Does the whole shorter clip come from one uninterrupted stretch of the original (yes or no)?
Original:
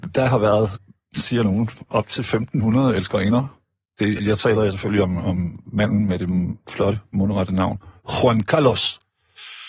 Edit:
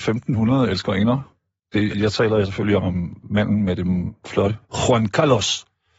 no